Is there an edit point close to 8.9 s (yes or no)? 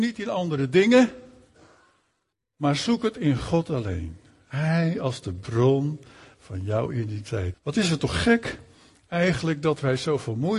no